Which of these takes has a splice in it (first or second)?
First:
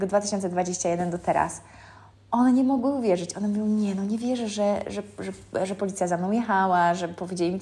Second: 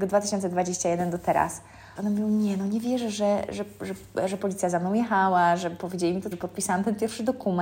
second